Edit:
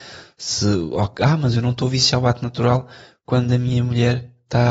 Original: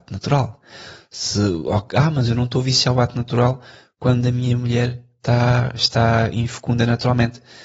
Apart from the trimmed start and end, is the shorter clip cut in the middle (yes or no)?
no